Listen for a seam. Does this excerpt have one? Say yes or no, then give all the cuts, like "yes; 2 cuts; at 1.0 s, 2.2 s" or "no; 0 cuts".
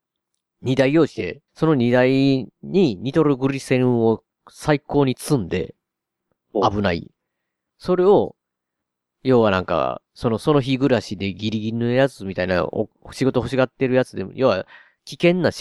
yes; 1 cut; at 1.5 s